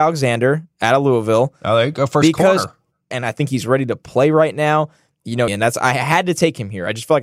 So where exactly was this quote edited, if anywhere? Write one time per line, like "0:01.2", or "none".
0:03.1
0:05.5